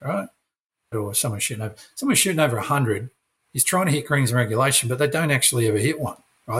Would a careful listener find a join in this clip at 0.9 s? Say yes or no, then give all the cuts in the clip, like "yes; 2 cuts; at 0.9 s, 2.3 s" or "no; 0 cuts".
yes; 1 cut; at 0.9 s